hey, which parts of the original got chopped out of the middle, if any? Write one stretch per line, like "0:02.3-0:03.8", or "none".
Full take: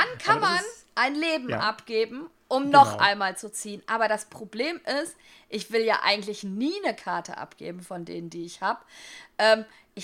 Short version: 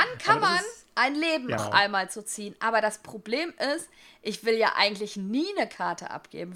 0:01.6-0:02.9